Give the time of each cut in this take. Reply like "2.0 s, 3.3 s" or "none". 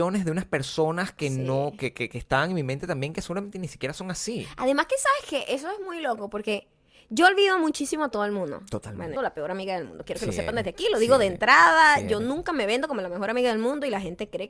9.2 s